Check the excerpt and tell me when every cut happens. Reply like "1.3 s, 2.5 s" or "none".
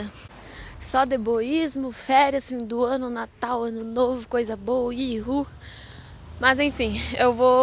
none